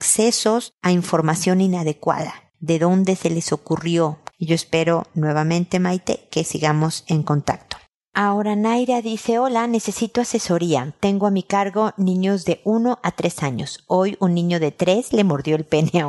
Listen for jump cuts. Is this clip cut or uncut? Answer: cut